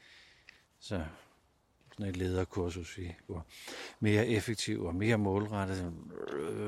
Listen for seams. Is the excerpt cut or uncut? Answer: cut